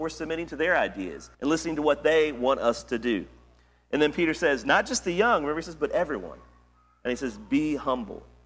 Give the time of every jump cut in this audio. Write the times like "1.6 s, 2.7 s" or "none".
1.3 s